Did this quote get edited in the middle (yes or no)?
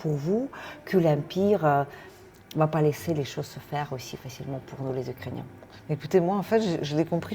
no